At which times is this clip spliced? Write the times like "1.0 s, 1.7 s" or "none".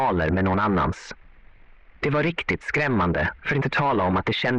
none